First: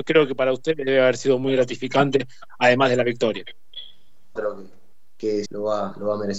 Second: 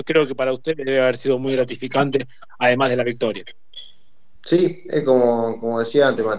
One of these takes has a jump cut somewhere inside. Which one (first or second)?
first